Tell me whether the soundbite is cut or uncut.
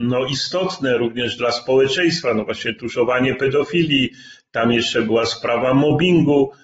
uncut